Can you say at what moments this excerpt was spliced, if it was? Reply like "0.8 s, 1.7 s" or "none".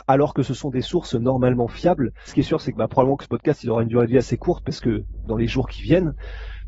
2.3 s, 5.3 s